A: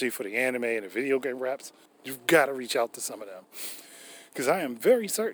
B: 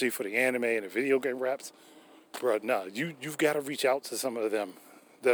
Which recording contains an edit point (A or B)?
A